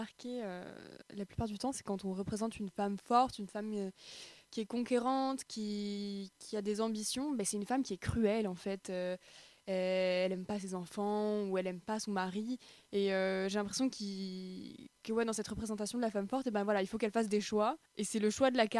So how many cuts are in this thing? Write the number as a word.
one